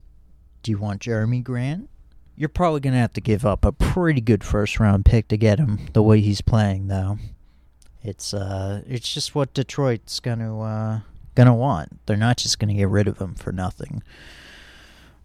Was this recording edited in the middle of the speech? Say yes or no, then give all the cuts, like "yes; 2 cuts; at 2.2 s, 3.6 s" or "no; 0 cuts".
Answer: yes; 1 cut; at 2.3 s